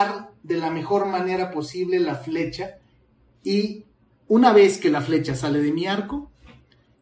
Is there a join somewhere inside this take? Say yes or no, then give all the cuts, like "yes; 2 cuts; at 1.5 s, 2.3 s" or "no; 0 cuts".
no; 0 cuts